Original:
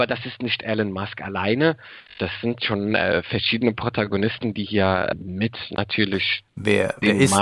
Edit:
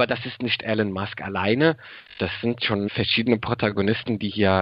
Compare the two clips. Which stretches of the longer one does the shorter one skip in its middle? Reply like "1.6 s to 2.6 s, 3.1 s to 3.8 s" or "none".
2.9 s to 3.2 s